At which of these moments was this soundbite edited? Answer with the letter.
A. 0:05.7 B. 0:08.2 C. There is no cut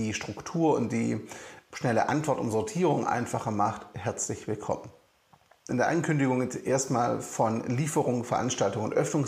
A